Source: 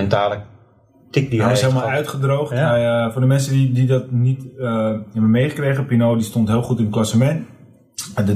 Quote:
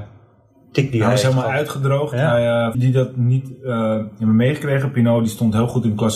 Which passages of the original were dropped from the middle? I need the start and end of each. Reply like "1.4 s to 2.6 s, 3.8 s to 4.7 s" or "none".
3.1 s to 3.7 s